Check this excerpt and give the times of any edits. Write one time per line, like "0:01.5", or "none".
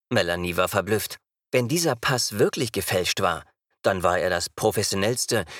none